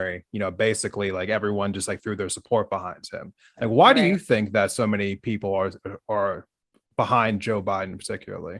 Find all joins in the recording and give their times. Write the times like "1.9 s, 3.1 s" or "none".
none